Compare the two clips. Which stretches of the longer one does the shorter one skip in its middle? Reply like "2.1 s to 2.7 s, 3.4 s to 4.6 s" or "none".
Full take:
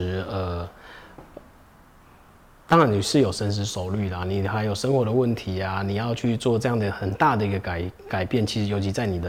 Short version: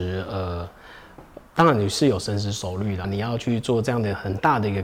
1.5 s to 2.6 s, 4.2 s to 5.8 s